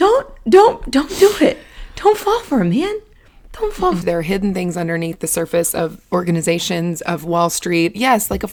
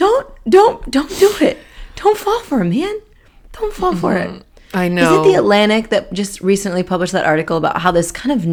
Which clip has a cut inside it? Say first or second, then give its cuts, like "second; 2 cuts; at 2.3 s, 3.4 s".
first; 1 cut; at 4.0 s